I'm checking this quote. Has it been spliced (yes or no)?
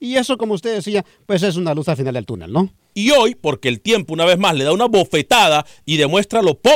yes